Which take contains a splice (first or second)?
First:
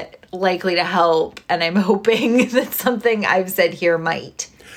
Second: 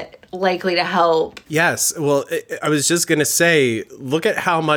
second